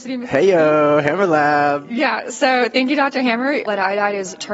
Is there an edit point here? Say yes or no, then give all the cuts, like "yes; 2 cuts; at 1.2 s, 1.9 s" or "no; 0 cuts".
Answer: yes; 1 cut; at 3.6 s